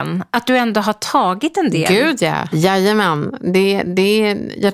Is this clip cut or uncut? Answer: cut